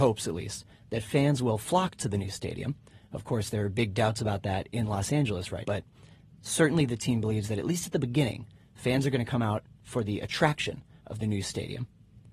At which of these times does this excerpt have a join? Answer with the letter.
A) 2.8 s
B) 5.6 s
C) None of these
B